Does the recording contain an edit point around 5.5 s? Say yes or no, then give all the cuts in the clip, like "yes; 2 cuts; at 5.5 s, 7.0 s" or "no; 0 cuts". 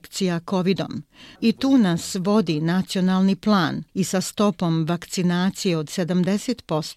no; 2 cuts; at 1.4 s, 3.9 s